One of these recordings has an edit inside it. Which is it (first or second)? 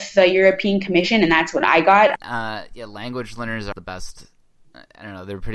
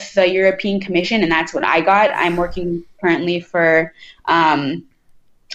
first